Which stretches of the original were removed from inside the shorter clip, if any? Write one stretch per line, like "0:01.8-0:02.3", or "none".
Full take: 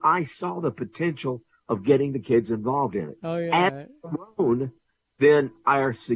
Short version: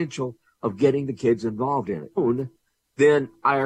0:03.2-0:04.3